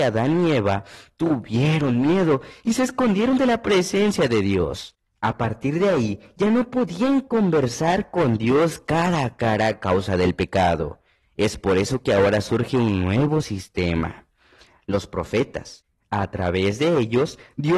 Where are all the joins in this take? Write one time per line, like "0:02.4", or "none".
none